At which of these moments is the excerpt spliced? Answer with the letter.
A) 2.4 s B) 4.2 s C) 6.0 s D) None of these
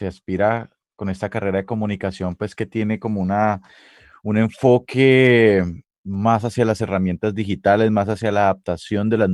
C